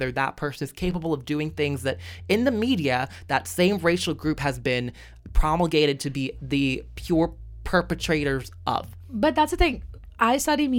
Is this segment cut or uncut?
uncut